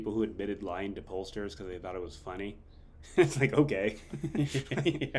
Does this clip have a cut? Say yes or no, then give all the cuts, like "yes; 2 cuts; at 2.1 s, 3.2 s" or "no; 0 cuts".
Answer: no; 0 cuts